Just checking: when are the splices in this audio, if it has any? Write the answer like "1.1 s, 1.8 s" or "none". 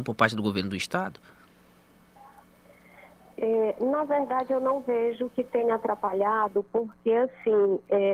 none